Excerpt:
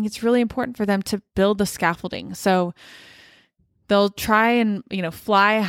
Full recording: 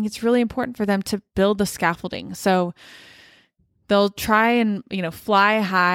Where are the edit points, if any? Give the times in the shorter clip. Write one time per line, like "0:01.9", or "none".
none